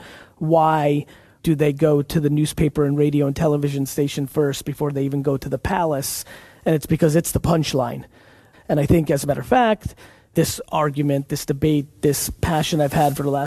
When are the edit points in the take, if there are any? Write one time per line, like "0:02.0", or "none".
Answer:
0:01.4
0:08.5
0:10.3